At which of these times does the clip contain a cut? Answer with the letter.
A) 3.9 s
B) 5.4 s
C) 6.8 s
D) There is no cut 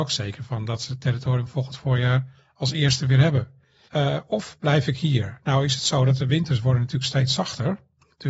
A